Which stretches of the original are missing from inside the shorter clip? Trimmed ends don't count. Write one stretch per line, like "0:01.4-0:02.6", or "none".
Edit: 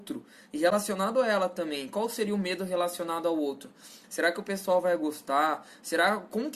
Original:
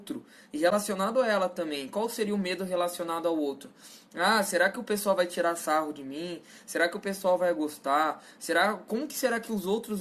0:04.0-0:06.6